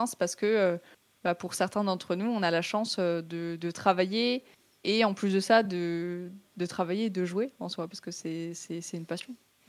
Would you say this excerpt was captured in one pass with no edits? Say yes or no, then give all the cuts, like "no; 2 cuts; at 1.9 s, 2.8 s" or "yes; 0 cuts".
yes; 0 cuts